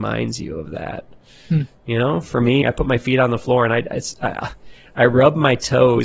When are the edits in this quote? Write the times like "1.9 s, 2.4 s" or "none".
2.6 s